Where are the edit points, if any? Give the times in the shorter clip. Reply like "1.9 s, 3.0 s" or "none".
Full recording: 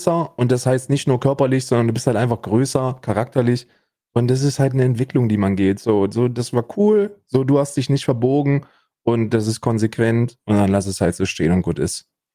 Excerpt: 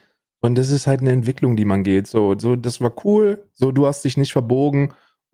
none